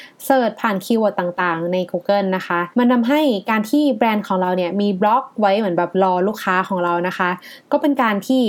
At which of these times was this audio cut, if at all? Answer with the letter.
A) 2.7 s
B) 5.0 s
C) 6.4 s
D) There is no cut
A